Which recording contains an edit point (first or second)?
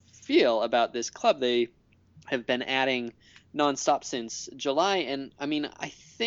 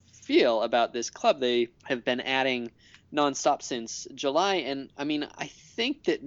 second